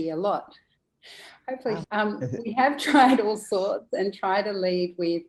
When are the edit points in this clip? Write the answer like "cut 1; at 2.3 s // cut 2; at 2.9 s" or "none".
cut 1; at 1.8 s